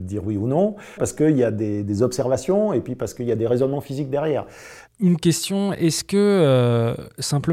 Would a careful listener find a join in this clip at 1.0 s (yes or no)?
yes